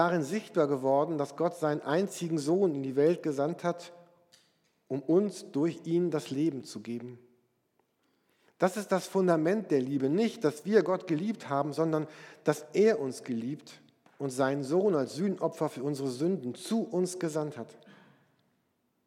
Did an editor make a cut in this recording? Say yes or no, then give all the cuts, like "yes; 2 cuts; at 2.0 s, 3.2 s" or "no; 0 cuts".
no; 0 cuts